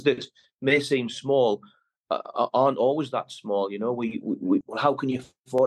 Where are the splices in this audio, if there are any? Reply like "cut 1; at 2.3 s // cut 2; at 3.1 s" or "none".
cut 1; at 4.6 s